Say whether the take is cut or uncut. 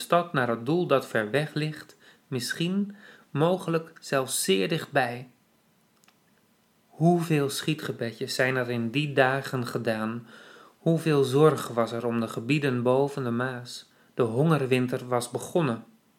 uncut